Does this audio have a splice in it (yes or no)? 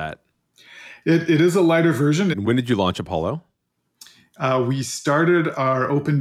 yes